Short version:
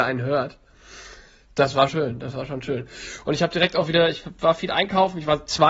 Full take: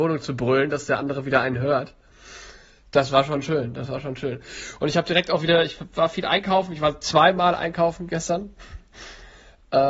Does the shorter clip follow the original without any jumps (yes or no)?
no